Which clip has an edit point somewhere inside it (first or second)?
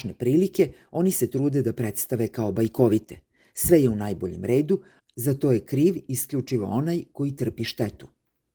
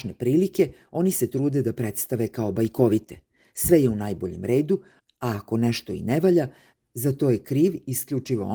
first